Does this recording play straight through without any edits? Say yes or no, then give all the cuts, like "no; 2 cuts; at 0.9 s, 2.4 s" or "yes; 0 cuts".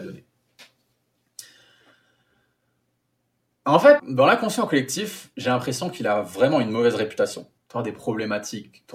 no; 3 cuts; at 4.0 s, 5.3 s, 7.6 s